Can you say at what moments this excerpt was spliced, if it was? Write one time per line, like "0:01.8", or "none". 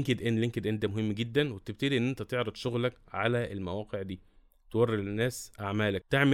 none

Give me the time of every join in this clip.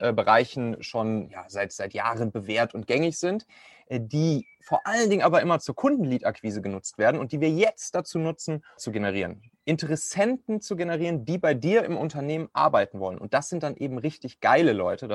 0:08.8

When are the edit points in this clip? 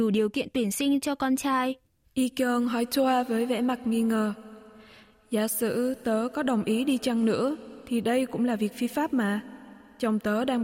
0:02.0

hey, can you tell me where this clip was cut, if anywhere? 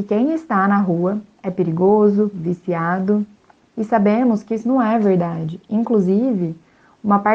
0:02.3

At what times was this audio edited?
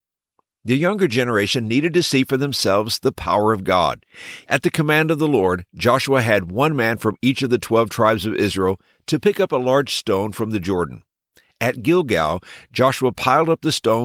0:04.4

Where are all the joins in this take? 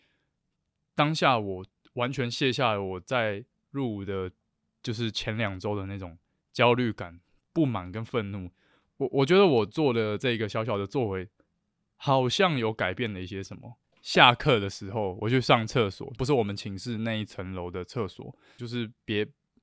0:13.8
0:16.2
0:18.6

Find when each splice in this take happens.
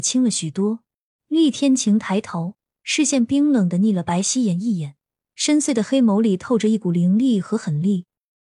0:01.2

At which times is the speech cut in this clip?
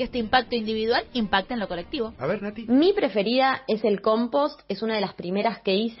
none

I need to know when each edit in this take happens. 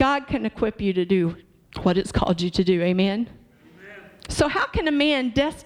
none

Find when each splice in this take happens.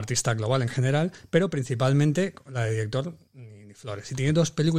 none

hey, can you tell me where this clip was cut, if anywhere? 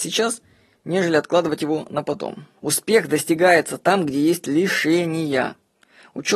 0:02.6

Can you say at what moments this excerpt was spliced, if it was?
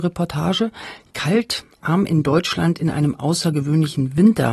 none

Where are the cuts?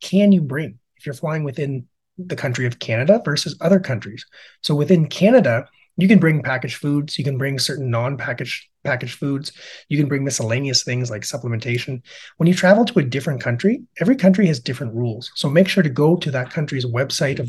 none

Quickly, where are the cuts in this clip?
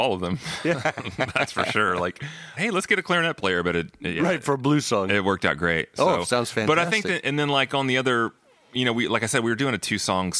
0:02.6

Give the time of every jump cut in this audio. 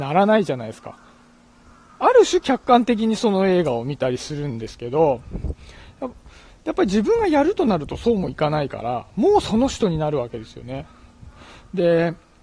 none

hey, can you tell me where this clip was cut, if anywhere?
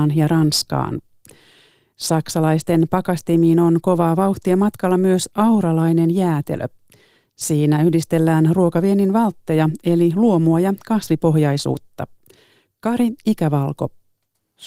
none

